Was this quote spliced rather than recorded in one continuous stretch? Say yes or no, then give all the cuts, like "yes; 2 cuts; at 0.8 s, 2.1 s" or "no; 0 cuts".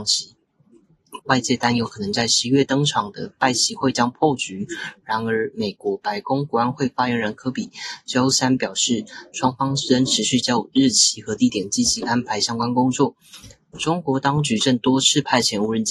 yes; 1 cut; at 1.2 s